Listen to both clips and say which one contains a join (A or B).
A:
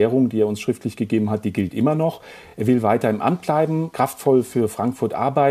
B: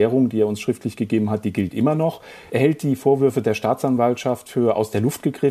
B